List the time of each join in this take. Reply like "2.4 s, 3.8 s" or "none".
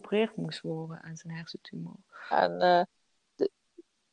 2.3 s